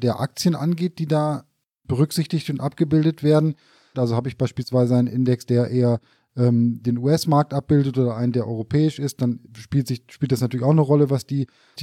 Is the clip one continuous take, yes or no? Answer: no